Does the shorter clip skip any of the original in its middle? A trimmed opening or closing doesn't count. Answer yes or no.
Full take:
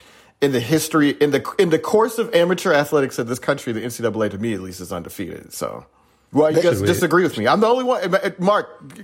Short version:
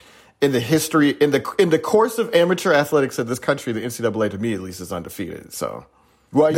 no